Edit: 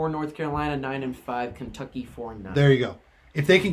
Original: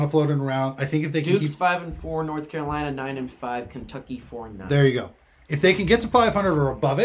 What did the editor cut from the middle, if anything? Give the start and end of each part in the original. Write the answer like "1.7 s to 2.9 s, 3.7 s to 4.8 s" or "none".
none